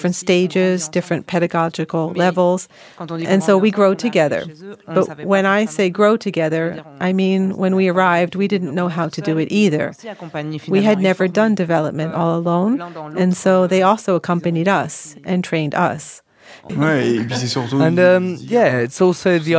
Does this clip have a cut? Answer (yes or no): yes